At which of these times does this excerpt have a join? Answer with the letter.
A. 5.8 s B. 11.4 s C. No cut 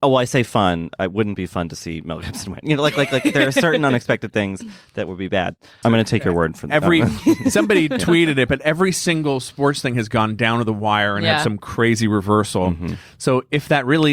A